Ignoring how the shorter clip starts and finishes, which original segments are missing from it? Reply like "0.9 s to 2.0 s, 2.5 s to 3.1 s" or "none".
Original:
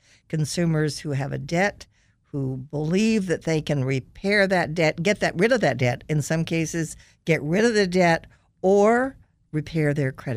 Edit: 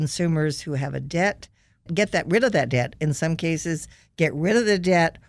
2.2 s to 4.9 s